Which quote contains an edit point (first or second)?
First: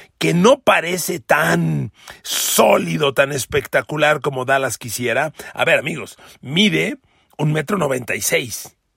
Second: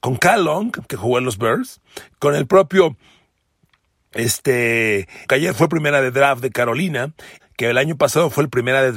second